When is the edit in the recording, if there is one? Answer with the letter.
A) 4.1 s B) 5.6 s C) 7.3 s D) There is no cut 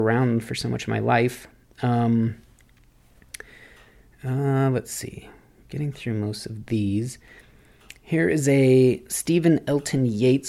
A